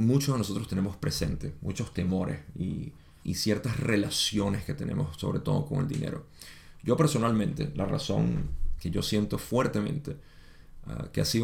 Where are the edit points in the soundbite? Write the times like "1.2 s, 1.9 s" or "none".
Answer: 3.2 s, 8.8 s